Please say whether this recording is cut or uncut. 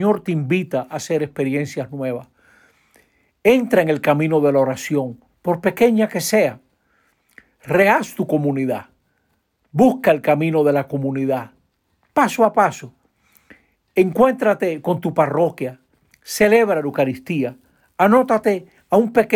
uncut